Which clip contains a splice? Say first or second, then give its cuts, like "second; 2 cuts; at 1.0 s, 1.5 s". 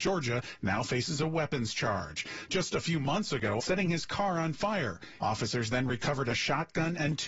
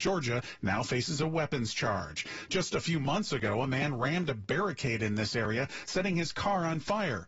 first; 2 cuts; at 3.6 s, 5.2 s